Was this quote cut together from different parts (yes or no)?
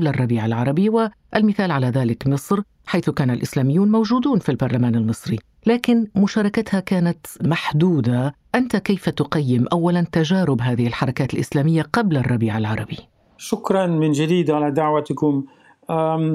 no